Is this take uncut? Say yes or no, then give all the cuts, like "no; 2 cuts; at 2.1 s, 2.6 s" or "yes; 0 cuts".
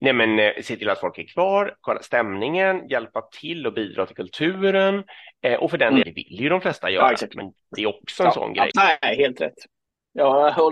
no; 2 cuts; at 6.0 s, 8.7 s